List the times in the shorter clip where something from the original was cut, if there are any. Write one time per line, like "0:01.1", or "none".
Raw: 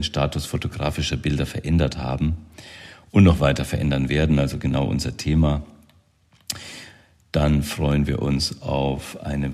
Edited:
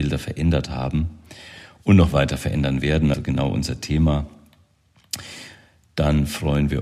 0:03.1